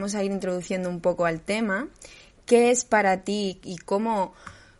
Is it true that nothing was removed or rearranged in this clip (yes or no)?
no